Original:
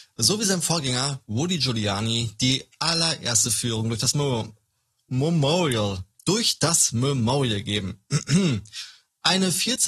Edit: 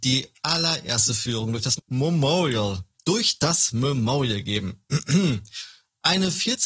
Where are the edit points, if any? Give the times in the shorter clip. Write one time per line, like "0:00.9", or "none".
0:01.8